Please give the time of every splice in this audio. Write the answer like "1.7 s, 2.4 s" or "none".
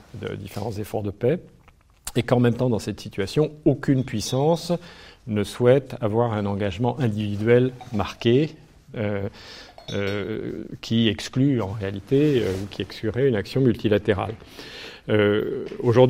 none

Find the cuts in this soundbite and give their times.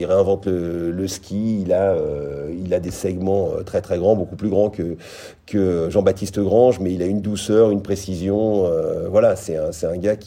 none

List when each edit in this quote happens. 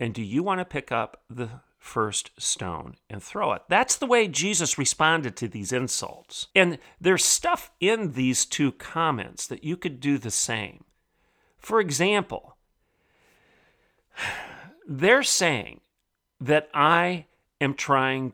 6.5 s

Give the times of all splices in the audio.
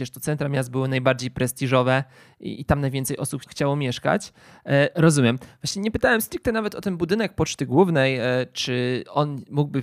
3.4 s, 4.9 s

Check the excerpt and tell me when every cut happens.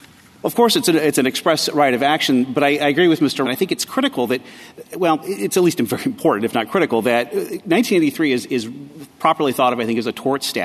3.4 s

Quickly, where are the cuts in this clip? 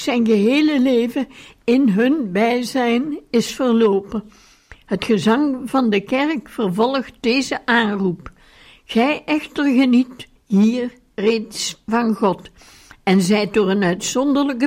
10.4 s

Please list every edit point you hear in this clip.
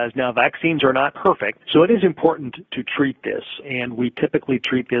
1.6 s

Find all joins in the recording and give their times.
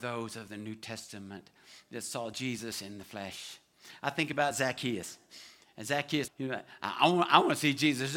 6.3 s

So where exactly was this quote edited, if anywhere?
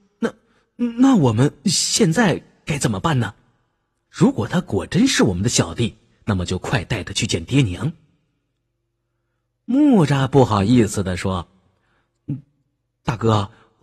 4.1 s

